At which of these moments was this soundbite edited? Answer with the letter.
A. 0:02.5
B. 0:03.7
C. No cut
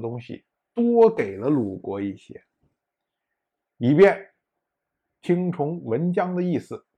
C